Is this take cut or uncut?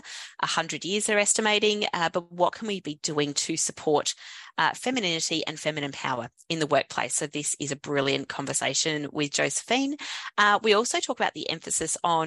uncut